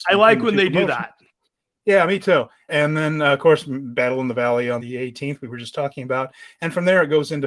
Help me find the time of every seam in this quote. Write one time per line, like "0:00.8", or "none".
0:02.7
0:04.8